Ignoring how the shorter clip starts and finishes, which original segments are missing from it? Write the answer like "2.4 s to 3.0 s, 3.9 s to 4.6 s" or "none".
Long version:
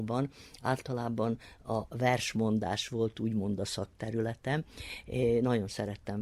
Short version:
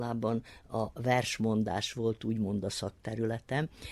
none